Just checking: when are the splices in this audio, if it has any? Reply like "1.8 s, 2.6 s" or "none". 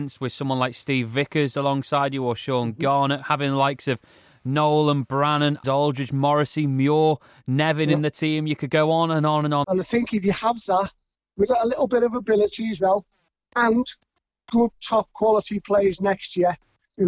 5.6 s, 9.6 s